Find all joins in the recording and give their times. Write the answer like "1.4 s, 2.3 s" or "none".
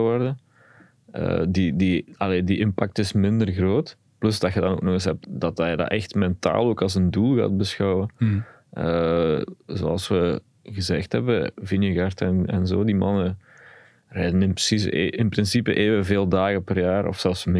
5.2 s